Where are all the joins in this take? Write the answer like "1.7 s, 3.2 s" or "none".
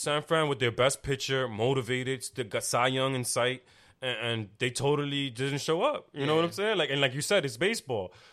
none